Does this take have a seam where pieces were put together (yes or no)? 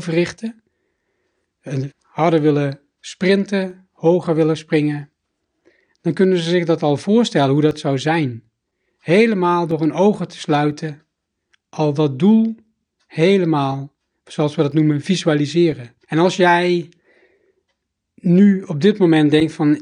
yes